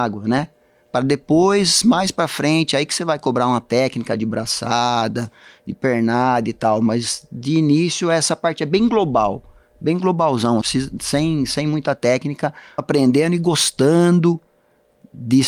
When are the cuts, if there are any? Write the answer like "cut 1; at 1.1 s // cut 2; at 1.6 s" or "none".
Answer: cut 1; at 10.6 s // cut 2; at 12.8 s